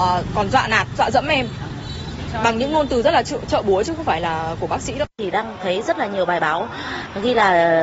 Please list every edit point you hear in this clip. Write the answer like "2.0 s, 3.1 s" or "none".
5.1 s